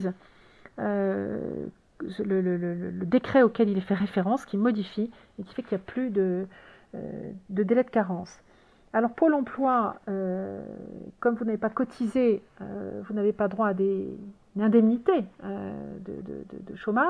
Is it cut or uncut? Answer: uncut